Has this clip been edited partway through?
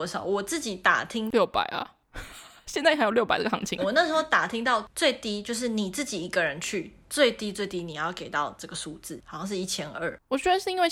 yes; 1 cut; at 3.8 s

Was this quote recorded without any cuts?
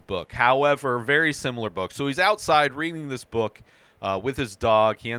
yes; 0 cuts

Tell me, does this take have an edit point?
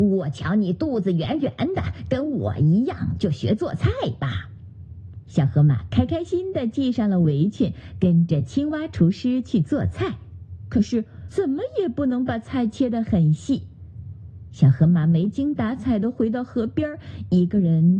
yes; 2 cuts; at 6.3 s, 11.3 s

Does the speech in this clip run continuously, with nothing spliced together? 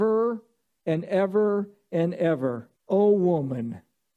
no; 1 cut; at 2.8 s

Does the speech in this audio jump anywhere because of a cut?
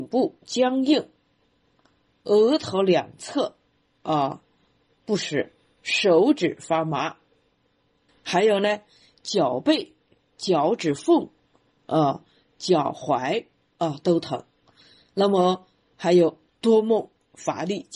yes; 2 cuts; at 8.1 s, 13.6 s

